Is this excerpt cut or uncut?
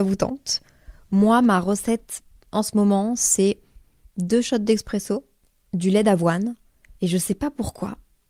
uncut